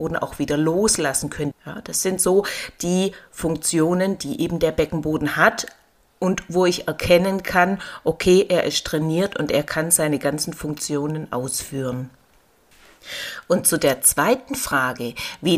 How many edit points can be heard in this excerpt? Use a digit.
1